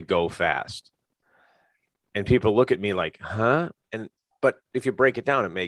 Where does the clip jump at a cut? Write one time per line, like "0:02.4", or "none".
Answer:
none